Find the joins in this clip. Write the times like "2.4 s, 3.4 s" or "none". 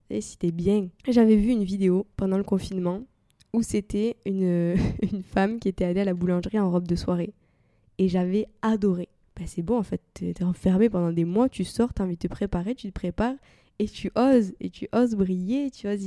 9.2 s